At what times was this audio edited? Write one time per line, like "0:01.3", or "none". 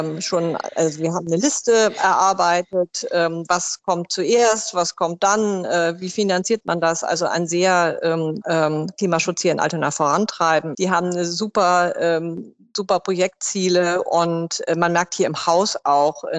0:08.4
0:10.7

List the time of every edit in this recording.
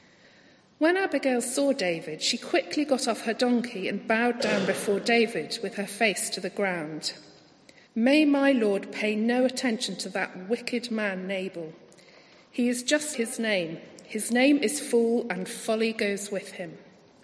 0:07.9
0:13.1

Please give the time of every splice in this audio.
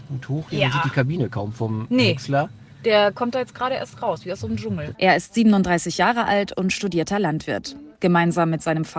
0:04.9

